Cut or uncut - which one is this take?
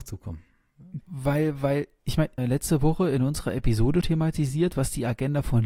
cut